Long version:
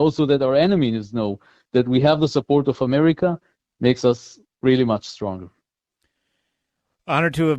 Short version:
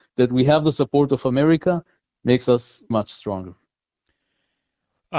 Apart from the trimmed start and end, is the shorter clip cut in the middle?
yes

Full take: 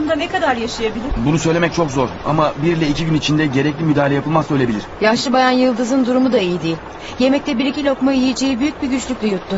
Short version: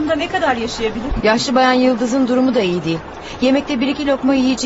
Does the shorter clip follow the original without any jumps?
no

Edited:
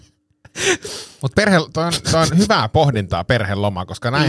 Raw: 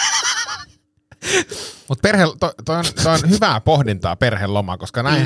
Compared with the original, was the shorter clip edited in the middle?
yes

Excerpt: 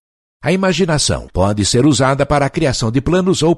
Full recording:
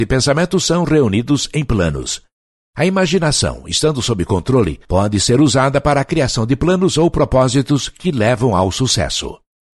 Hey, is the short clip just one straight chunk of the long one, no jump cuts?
no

